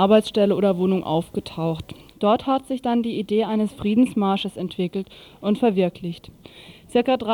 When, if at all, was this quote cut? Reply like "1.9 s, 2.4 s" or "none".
2.1 s